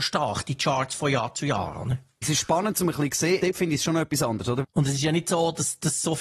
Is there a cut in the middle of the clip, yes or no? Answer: yes